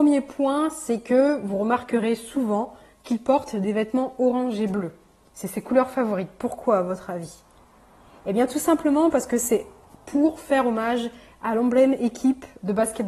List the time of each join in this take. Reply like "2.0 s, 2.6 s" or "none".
none